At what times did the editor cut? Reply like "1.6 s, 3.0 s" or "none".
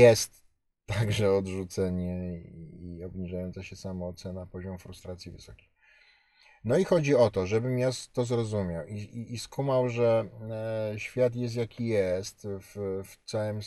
none